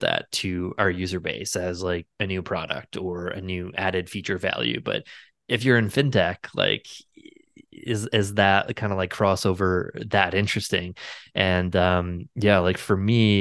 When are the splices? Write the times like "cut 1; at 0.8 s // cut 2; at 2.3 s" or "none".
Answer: none